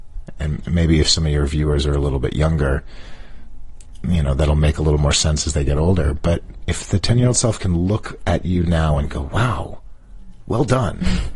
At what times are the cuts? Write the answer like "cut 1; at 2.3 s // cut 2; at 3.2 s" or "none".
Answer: none